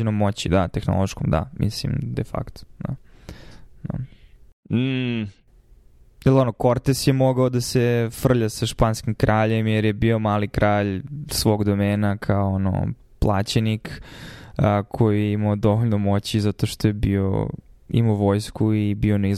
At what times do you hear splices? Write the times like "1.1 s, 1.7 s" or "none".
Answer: none